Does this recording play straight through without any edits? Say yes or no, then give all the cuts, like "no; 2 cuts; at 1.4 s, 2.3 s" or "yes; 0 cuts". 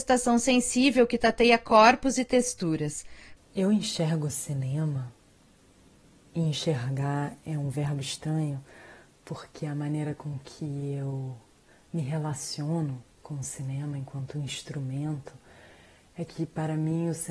no; 1 cut; at 3.4 s